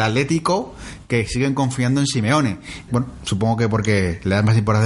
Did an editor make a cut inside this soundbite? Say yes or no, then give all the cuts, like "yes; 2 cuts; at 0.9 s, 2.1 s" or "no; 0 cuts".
yes; 1 cut; at 2.9 s